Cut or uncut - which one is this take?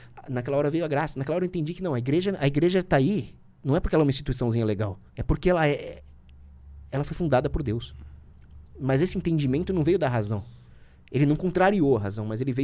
cut